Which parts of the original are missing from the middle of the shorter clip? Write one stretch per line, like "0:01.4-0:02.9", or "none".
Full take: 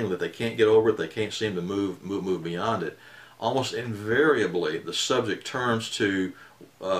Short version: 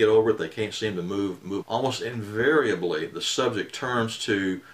0:02.2-0:03.3